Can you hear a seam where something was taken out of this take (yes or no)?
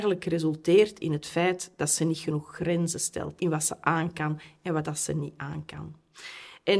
yes